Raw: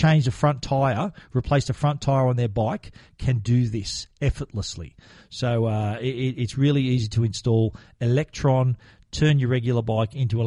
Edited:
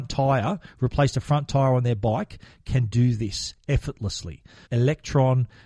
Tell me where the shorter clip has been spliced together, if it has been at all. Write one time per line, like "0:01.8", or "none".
0:04.6